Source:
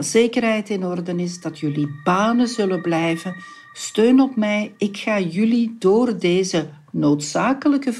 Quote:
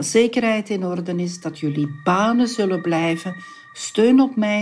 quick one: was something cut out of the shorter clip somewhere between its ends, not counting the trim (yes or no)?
no